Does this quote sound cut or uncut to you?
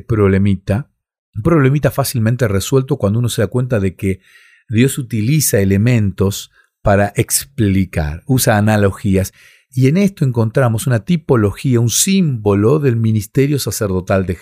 uncut